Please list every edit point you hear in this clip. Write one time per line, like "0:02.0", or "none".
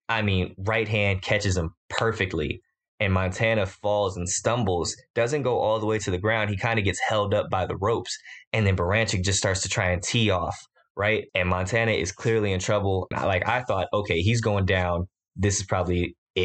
0:11.3
0:13.1